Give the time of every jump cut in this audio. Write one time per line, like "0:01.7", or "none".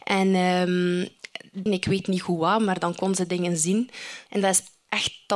0:01.7
0:04.3